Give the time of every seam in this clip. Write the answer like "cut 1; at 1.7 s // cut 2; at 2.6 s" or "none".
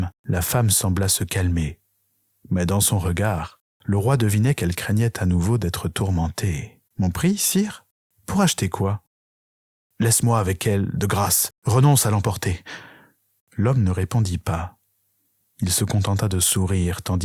cut 1; at 6.9 s // cut 2; at 13.4 s